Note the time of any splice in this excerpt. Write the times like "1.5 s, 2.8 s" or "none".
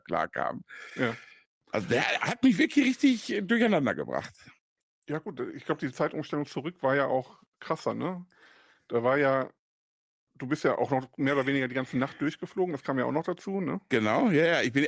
none